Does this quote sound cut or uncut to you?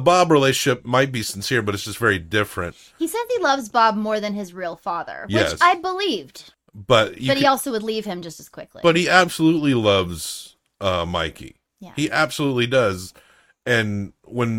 uncut